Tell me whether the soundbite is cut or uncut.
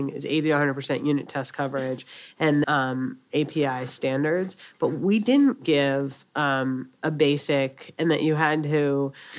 cut